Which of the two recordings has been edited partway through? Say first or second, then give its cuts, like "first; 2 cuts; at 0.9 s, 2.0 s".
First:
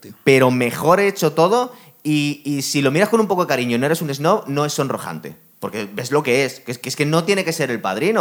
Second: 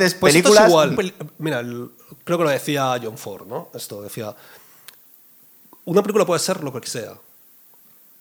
second; 1 cut; at 0.9 s